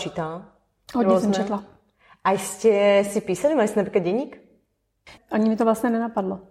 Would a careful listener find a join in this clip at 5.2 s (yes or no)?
yes